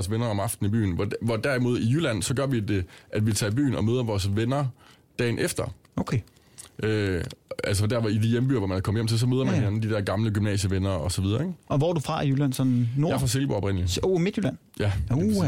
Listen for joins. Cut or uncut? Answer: uncut